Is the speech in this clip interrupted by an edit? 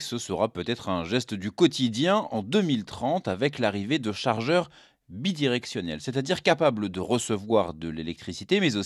no; 0 cuts

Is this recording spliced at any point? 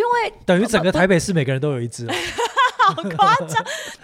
no; 0 cuts

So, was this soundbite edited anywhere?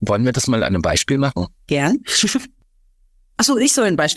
no; 0 cuts

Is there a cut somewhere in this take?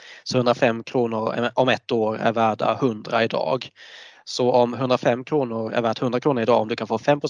no; 0 cuts

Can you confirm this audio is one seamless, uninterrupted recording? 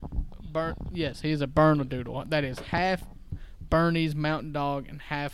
yes; 0 cuts

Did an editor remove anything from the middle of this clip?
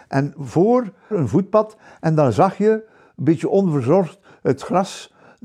yes; 1 cut; at 1.1 s

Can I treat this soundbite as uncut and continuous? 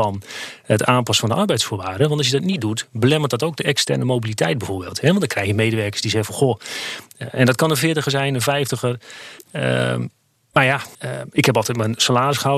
no; 2 cuts; at 9.4 s, 10.9 s

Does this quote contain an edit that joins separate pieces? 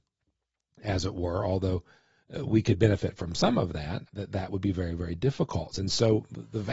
yes; 2 cuts; at 4.1 s, 5.7 s

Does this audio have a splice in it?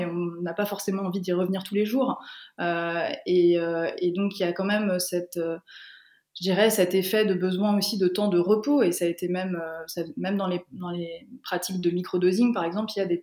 no; 0 cuts

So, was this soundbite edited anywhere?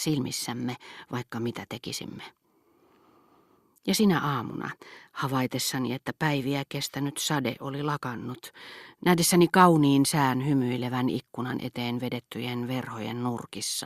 no; 0 cuts

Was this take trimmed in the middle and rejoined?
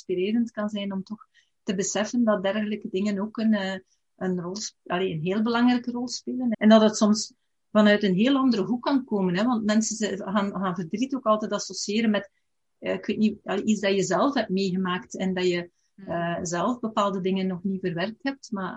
yes; 1 cut; at 6.5 s

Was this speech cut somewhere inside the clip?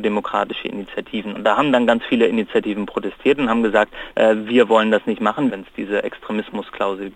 yes; 3 cuts; at 1.4 s, 4.1 s, 5.5 s

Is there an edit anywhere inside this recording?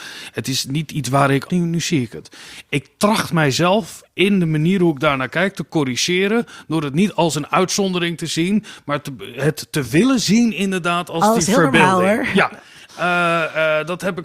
yes; 1 cut; at 1.5 s

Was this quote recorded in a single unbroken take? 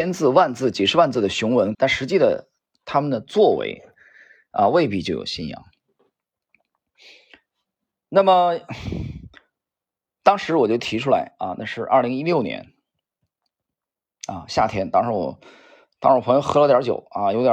no; 1 cut; at 1.7 s

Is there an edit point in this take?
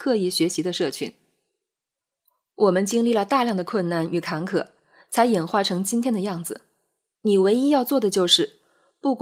yes; 1 cut; at 7.1 s

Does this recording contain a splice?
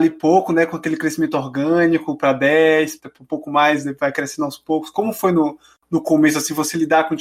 yes; 1 cut; at 3.0 s

